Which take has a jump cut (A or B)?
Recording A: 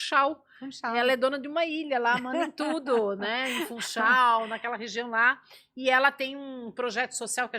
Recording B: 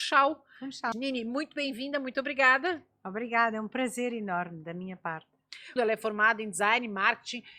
B